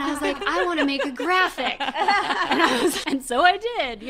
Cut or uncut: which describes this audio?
cut